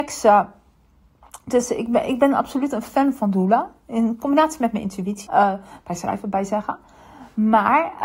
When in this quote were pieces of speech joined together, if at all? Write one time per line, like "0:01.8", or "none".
0:05.3

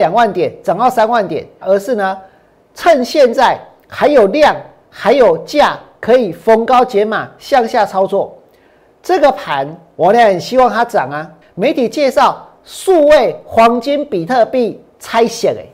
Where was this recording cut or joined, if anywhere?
0:01.6
0:11.4

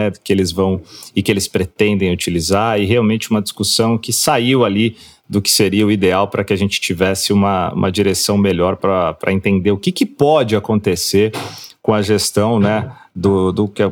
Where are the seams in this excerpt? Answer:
none

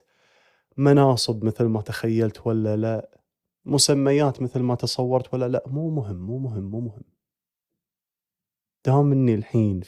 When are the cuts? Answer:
none

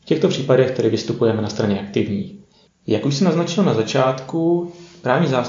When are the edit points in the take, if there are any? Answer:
0:02.7

